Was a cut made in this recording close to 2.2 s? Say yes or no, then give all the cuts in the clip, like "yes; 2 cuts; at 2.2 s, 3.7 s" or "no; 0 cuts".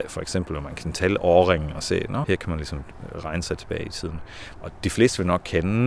yes; 2 cuts; at 2.2 s, 4.5 s